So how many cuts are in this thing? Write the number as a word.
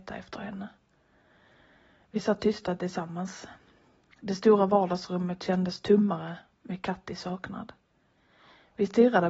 zero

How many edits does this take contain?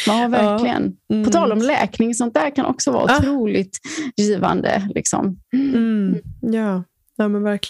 zero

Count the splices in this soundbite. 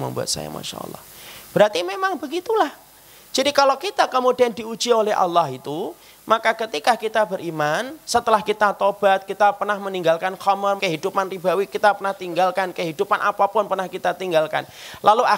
one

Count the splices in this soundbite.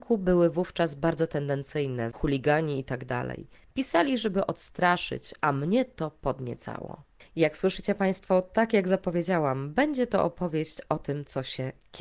one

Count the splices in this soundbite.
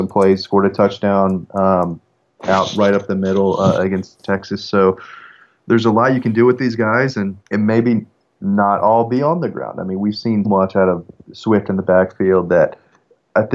two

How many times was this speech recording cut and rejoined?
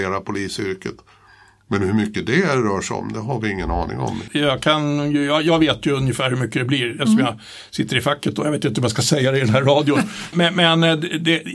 two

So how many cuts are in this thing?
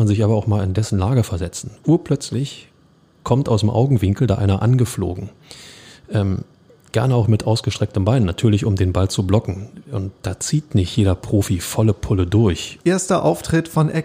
two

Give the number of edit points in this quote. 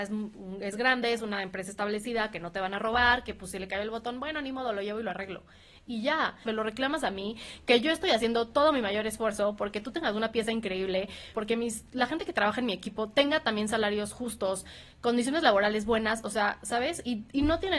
two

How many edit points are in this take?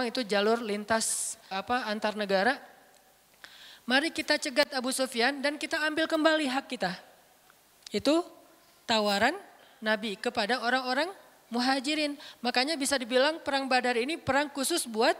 one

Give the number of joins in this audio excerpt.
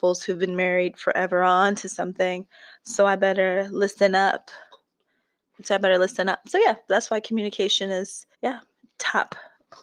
two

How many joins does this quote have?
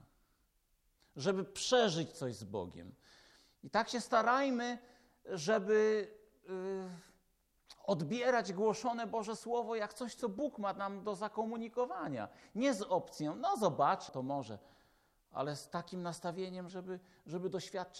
two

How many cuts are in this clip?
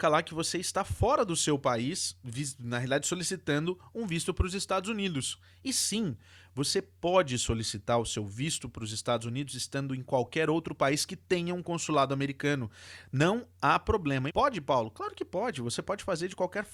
one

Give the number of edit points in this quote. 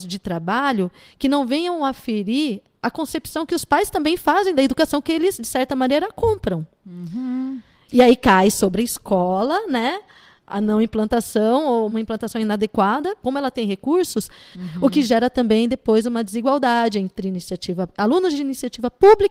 three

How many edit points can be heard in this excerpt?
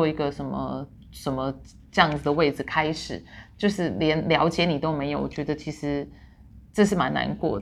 zero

